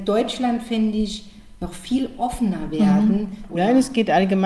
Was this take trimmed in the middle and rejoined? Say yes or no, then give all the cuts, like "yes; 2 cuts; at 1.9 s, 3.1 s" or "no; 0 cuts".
yes; 1 cut; at 3.5 s